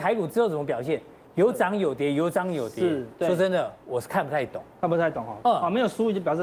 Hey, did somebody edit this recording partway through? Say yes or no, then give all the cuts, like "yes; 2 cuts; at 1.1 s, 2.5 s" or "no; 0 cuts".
yes; 1 cut; at 5.4 s